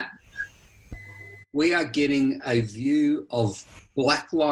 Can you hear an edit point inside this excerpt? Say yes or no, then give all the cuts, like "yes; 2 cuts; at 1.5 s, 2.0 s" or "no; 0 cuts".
yes; 1 cut; at 1.4 s